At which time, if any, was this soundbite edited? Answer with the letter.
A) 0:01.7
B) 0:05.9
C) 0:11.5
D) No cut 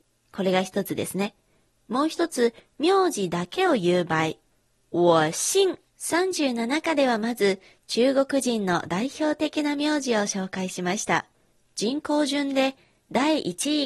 B